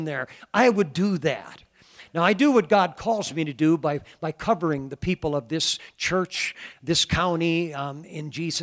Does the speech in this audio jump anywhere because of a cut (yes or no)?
no